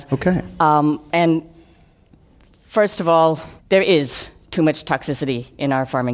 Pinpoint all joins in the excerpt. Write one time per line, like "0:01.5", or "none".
0:03.6